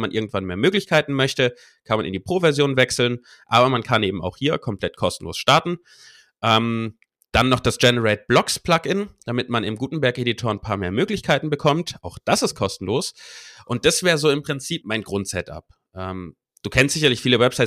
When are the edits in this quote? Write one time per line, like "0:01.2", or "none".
0:14.8